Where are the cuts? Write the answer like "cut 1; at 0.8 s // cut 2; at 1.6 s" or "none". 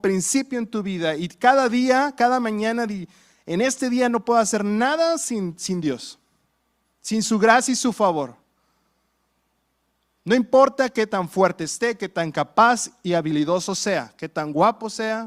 none